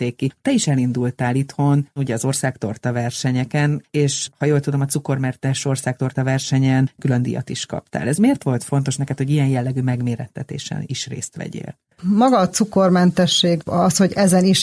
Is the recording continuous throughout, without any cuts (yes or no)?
yes